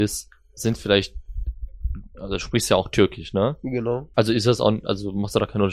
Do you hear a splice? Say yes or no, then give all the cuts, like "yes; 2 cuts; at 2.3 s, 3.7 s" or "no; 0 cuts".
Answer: yes; 1 cut; at 4.1 s